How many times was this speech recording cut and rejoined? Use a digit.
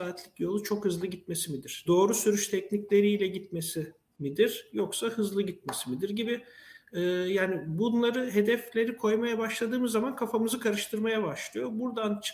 1